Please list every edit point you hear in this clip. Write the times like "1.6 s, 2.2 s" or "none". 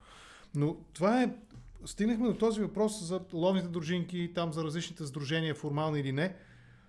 none